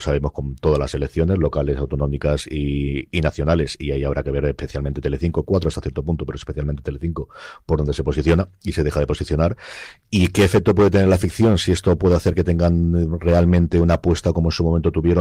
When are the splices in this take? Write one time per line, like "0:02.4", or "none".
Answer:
none